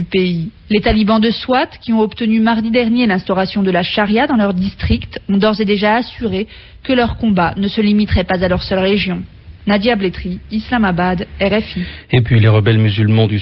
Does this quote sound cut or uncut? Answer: uncut